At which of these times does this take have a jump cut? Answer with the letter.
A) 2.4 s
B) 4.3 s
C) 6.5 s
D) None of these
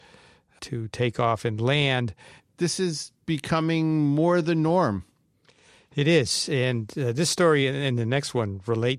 A